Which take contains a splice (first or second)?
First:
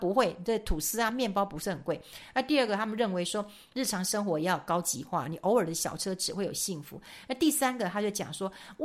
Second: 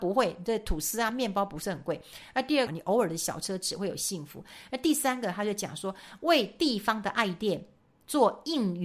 second